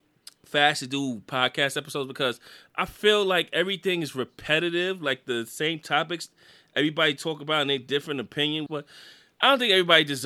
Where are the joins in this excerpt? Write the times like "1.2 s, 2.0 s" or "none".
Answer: 8.7 s